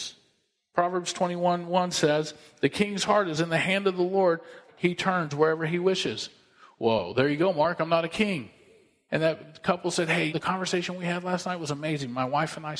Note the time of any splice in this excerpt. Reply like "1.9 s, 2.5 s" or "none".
4.7 s, 9.1 s, 10.3 s